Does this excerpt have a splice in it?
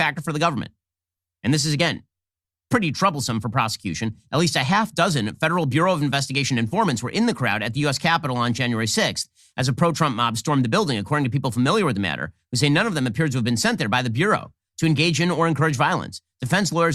no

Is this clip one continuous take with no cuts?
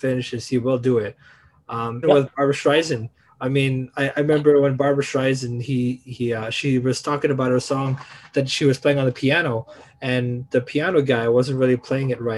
no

